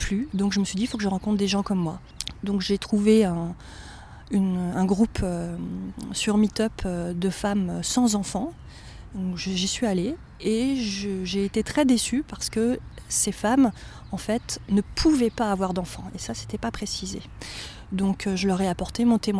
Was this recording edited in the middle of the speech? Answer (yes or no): no